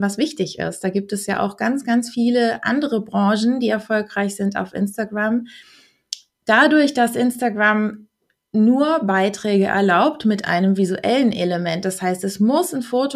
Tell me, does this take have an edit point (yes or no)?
no